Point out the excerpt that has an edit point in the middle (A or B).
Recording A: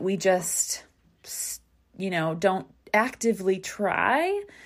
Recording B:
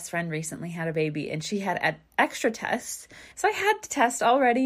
B